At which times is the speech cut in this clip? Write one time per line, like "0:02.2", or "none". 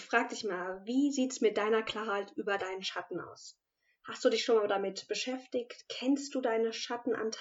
none

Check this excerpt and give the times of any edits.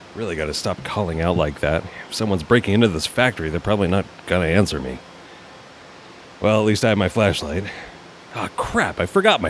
none

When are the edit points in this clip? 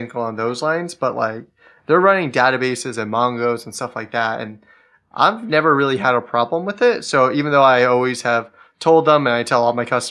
none

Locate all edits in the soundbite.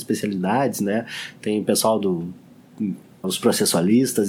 0:03.2

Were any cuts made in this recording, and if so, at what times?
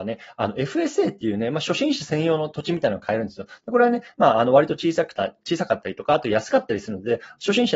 none

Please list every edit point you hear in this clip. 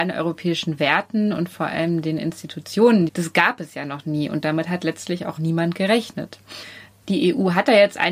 0:03.1
0:05.4

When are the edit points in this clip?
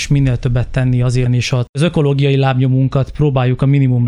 0:01.3

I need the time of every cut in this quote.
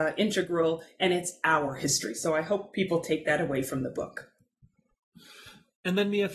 none

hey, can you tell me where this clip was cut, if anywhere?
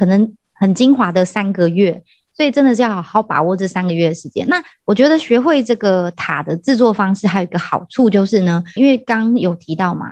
0:08.8

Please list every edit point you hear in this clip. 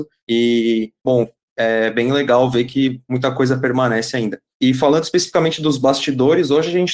none

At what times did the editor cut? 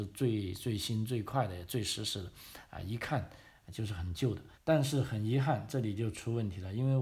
0:02.7
0:04.5

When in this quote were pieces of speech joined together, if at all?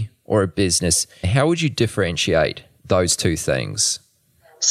0:01.2

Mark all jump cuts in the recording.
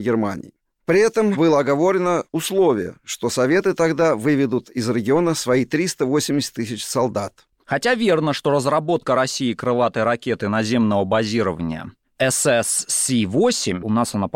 0:07.5

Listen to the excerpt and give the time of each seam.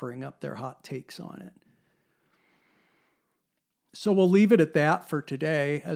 0:03.9

